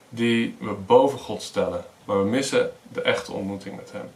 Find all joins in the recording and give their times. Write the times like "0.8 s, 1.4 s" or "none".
2.0 s

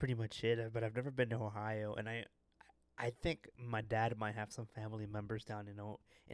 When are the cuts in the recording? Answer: none

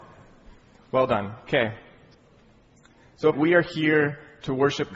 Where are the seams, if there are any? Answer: 3.3 s

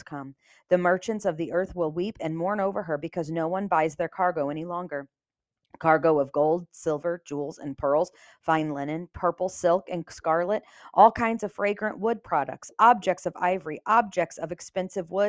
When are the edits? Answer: none

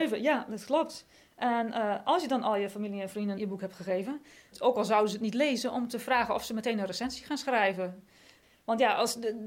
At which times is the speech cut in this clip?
3.4 s, 4.5 s

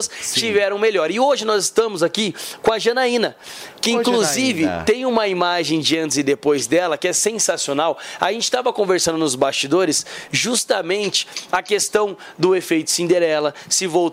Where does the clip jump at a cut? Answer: none

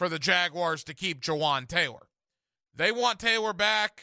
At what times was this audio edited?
2.6 s

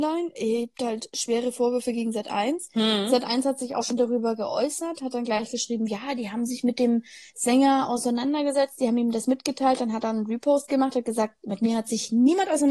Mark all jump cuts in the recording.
none

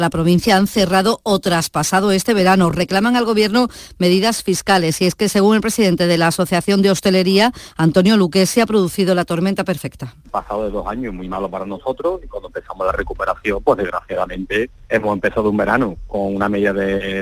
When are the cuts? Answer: none

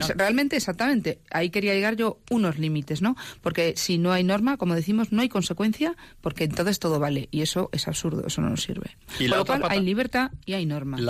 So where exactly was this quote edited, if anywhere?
none

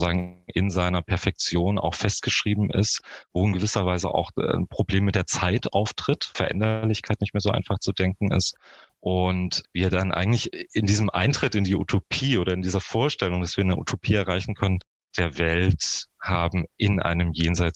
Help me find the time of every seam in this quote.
6.3 s, 15.1 s

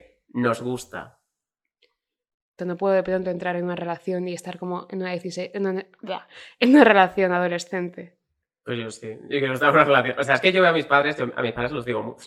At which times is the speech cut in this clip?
2.6 s

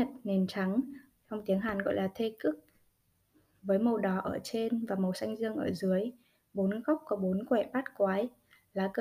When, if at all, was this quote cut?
1.1 s

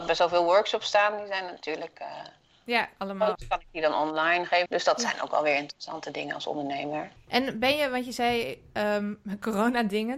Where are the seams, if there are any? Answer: 3.3 s, 4.7 s

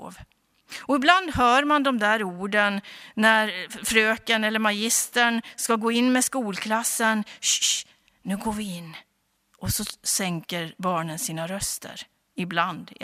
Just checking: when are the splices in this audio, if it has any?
7.6 s

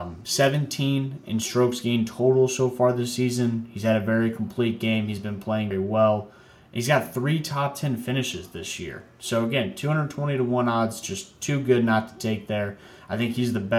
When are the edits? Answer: 5.7 s

